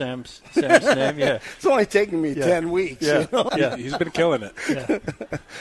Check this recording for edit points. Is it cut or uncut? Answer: cut